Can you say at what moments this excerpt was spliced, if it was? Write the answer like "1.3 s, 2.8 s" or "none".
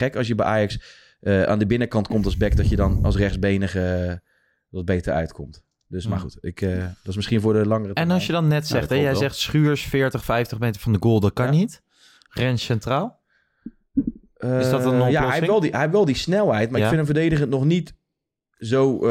none